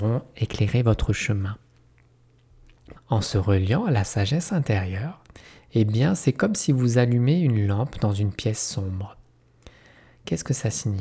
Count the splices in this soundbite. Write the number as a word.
one